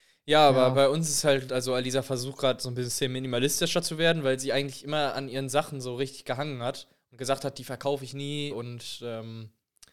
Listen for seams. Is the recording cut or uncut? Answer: cut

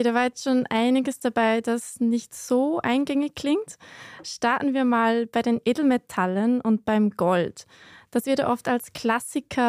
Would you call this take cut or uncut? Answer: uncut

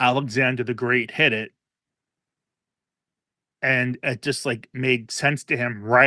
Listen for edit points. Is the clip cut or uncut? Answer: uncut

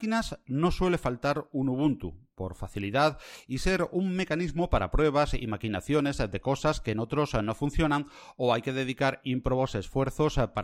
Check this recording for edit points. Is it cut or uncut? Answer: uncut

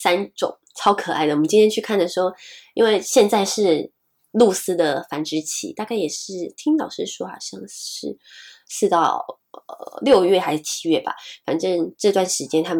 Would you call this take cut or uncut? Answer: uncut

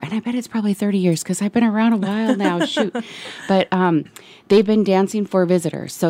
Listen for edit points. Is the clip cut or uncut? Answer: uncut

